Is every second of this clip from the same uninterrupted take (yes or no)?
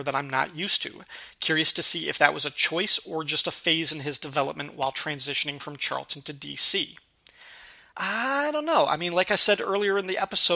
yes